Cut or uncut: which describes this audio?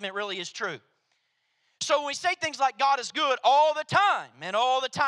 uncut